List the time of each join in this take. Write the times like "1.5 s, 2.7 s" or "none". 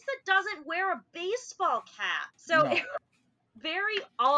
2.3 s